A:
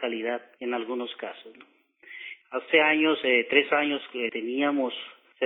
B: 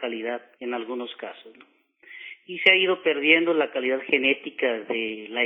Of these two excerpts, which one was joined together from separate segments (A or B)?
A